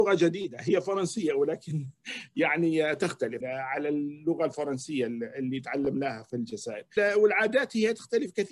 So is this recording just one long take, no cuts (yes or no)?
no